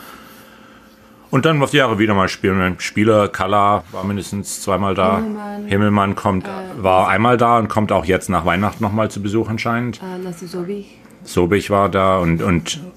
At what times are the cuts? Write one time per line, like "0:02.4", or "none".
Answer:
none